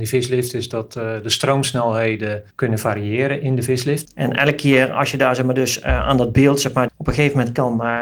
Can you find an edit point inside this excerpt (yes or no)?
yes